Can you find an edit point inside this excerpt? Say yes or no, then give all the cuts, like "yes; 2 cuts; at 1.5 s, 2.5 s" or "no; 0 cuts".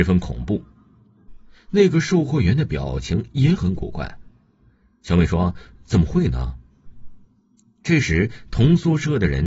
yes; 2 cuts; at 1.3 s, 6.9 s